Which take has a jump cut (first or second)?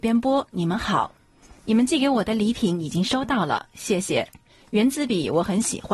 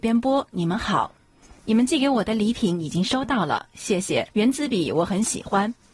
second